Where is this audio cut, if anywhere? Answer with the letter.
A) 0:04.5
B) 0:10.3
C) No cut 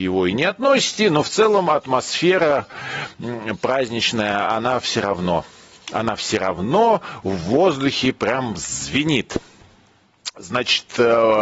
C